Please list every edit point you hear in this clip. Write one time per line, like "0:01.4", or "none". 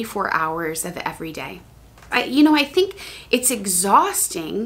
0:02.1